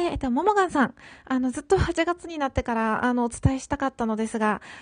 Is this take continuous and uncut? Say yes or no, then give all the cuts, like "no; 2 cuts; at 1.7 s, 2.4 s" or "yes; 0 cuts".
yes; 0 cuts